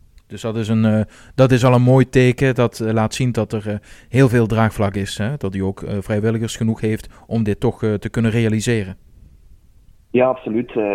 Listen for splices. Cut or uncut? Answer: uncut